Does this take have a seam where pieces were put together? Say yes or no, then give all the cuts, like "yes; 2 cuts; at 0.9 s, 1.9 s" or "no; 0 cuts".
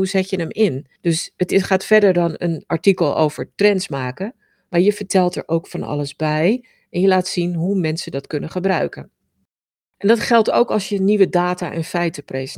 no; 0 cuts